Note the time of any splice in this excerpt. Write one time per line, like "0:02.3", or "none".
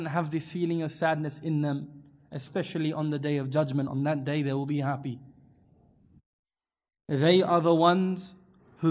none